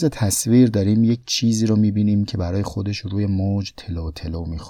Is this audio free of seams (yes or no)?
yes